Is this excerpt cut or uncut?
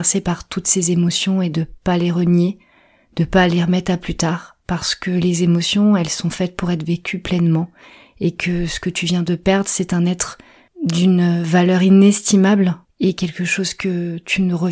cut